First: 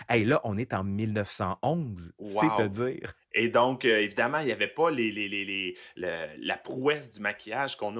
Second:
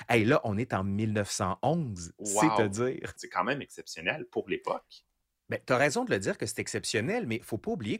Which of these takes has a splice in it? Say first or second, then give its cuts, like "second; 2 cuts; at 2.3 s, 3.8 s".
second; 1 cut; at 3.2 s